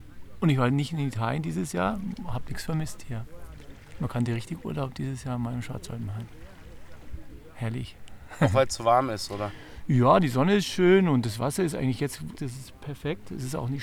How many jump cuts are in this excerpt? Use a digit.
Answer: 1